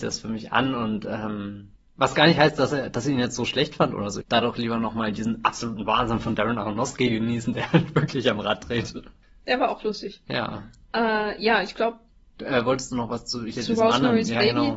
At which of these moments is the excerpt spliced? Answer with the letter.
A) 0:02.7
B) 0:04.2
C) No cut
B